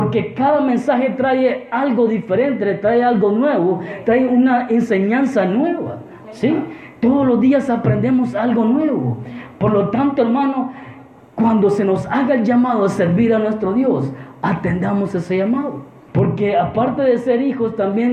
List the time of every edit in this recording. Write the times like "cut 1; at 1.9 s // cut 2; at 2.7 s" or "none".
cut 1; at 16.1 s